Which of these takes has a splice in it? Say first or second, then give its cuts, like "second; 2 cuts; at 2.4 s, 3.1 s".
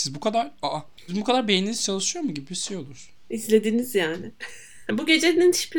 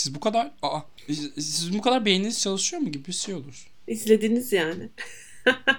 first; 2 cuts; at 1.1 s, 4.9 s